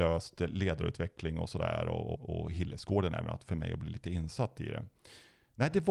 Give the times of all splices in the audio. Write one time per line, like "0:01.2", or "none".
0:02.1

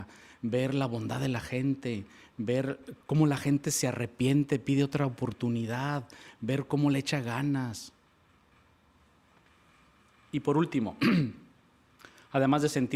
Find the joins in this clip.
0:03.0

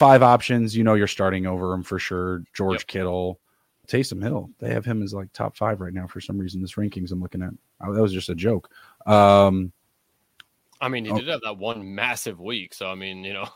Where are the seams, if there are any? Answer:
0:03.8

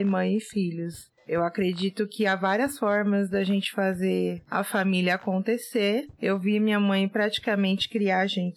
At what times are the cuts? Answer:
none

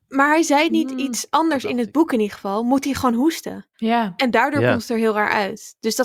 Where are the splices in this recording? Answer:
0:03.7

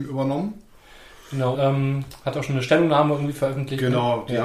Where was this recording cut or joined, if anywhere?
0:01.5

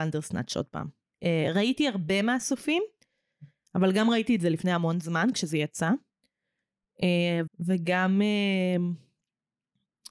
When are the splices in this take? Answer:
0:01.2
0:07.5

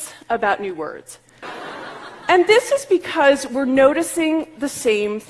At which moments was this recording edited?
0:01.4

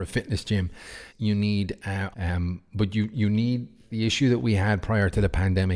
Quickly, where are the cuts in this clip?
0:01.1
0:02.1
0:03.9

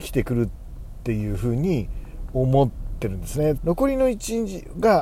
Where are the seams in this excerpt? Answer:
0:03.6

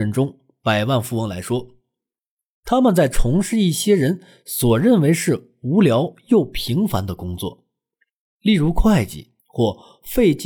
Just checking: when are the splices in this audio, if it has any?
0:09.4

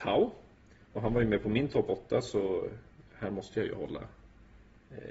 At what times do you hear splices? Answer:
none

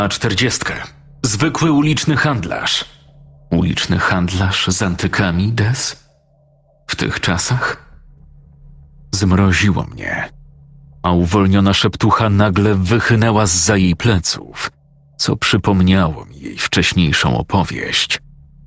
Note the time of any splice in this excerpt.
none

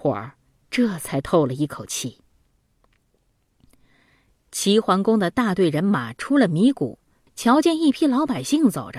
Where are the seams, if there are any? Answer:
0:07.3

